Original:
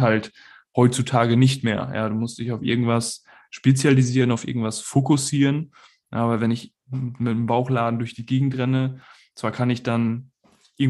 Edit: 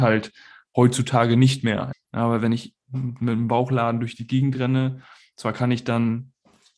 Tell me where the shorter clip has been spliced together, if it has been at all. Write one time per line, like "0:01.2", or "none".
0:01.9

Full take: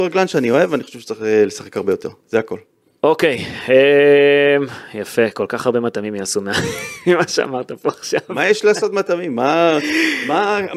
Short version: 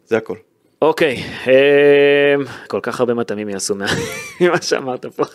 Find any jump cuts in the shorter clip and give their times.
0:02.7

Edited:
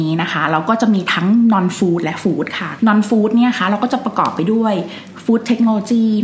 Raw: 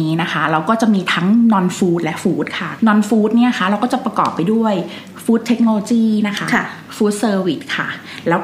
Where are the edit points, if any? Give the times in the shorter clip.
none

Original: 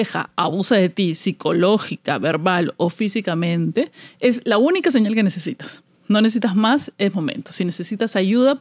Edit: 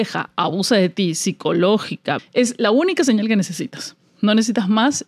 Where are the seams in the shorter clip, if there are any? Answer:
0:02.2

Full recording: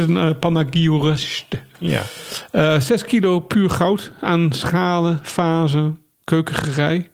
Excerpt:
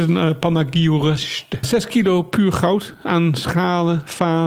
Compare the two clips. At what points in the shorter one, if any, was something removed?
0:01.6

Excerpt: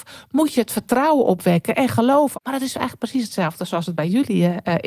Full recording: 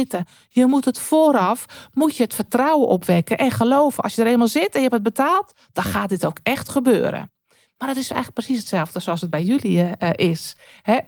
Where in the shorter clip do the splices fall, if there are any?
0:02.3

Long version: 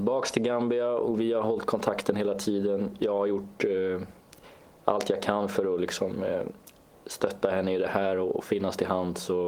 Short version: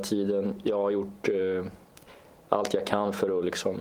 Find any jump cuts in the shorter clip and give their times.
none

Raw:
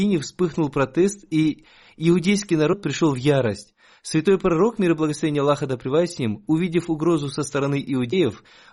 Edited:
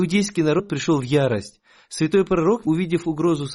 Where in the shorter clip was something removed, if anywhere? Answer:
0:02.6

